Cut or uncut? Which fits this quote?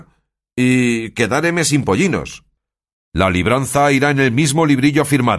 uncut